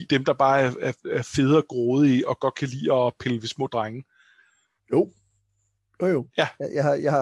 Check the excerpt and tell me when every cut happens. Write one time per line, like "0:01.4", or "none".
0:01.0
0:04.8
0:06.3